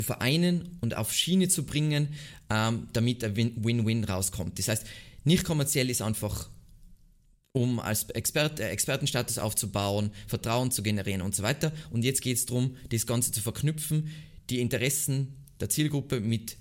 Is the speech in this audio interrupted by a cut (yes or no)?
no